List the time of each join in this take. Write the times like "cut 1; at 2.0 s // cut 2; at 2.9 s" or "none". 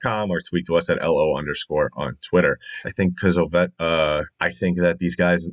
cut 1; at 2.8 s // cut 2; at 4.3 s